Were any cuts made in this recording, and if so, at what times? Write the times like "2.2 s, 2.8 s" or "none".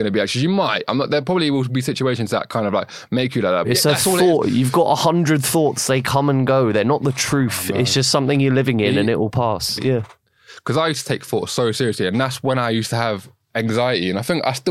3.6 s, 9.8 s

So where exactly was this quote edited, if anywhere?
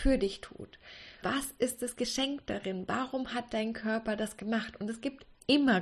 1.2 s

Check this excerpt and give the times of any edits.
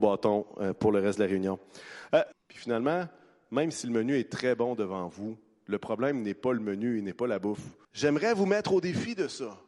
2.3 s, 7.8 s

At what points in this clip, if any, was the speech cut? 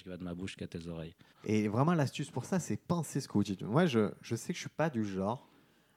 1.3 s

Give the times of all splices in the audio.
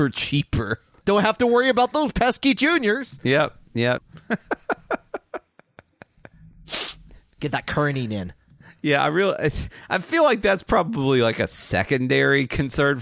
1.0 s, 4.0 s

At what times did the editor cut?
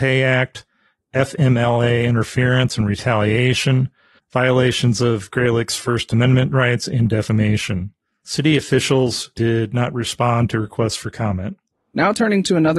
4.2 s

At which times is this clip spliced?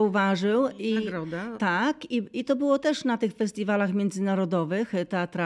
1.5 s

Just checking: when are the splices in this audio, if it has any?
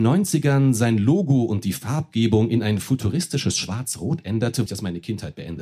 4.7 s

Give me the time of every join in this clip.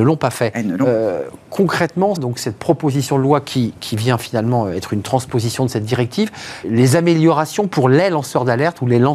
2.2 s, 6.6 s

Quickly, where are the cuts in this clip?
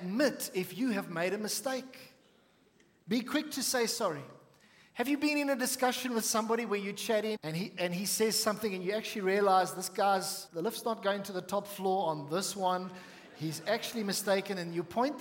7.4 s, 10.5 s

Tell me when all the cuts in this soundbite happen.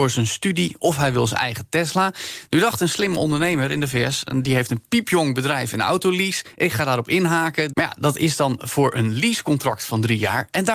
7.7 s

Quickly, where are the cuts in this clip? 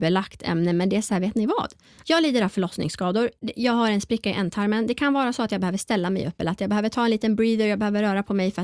2.0 s

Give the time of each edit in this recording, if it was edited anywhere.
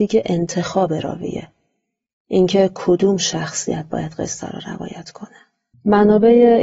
5.7 s

